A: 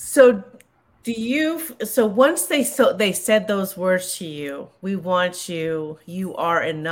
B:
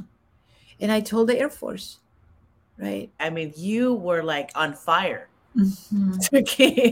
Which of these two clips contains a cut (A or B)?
B